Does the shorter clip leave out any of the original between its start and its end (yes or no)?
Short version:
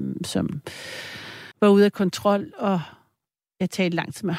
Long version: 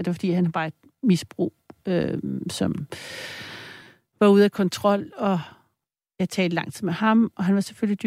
yes